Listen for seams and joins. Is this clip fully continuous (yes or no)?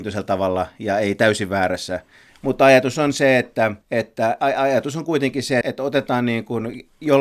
no